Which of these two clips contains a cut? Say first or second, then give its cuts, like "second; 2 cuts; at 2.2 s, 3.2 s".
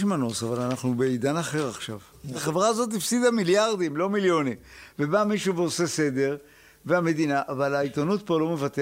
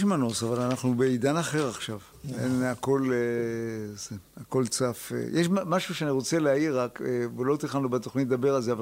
first; 1 cut; at 2.3 s